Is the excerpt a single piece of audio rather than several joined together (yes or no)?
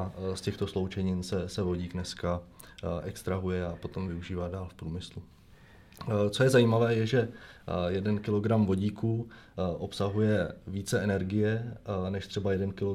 yes